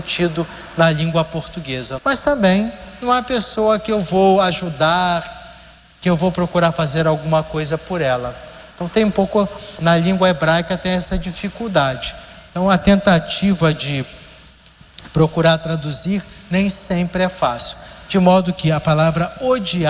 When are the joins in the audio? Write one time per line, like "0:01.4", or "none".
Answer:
0:02.0